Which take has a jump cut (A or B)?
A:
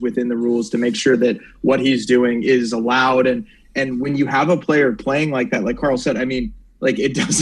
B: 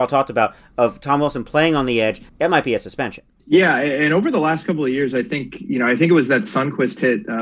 B